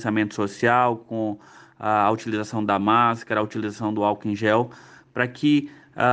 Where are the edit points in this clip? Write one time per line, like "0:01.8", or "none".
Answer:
none